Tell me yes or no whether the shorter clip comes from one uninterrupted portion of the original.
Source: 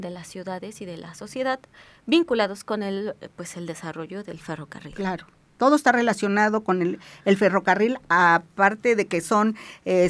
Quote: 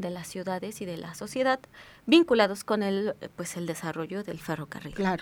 yes